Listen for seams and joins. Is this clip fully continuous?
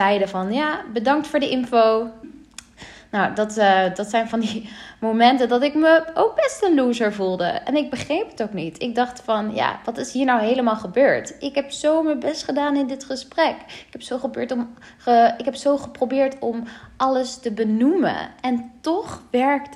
no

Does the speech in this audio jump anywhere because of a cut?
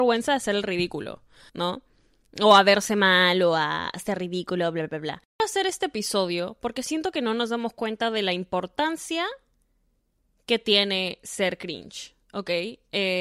yes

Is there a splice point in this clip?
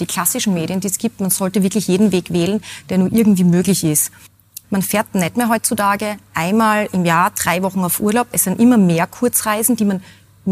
yes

